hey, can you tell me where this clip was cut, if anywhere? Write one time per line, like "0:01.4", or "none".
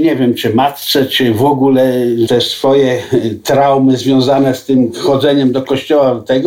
0:02.3

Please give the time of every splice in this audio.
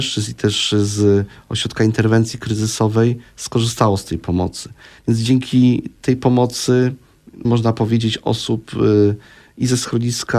0:05.0
0:07.4

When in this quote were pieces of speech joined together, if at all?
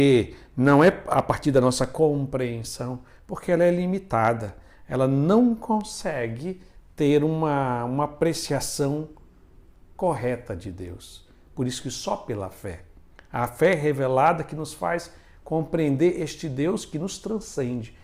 none

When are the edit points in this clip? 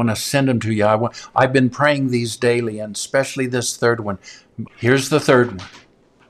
0:04.7

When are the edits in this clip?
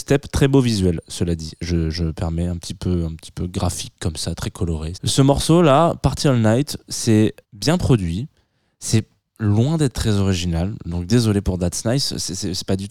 0:04.9
0:07.4

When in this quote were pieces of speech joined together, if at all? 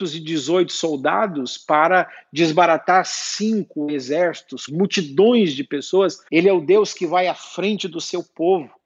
0:04.7
0:06.3

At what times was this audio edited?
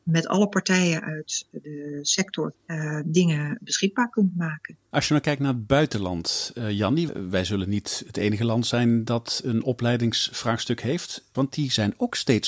0:07.1
0:11.3

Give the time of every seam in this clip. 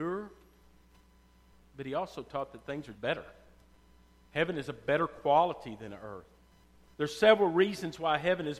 0:02.9

